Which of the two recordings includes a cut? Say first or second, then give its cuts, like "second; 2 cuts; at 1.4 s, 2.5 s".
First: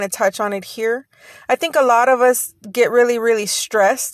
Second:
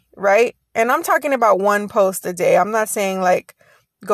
second; 1 cut; at 1.0 s